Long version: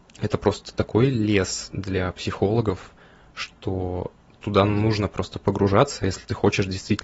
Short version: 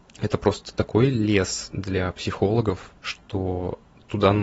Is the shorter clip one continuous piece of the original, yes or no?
no